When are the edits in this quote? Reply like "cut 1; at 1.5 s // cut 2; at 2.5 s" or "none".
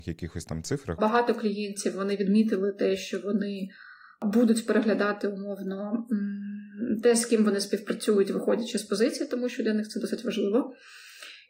cut 1; at 1.0 s